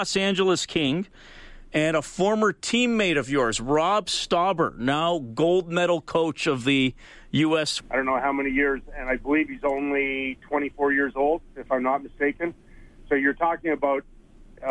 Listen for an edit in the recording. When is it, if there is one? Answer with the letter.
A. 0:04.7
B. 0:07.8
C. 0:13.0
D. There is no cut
B